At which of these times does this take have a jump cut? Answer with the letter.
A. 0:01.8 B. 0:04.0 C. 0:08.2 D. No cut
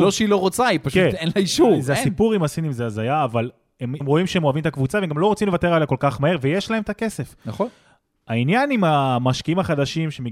B